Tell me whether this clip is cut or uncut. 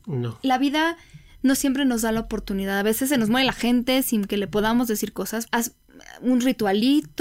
cut